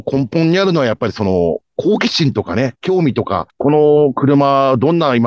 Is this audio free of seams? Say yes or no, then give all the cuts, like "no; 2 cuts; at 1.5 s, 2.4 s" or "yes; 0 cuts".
yes; 0 cuts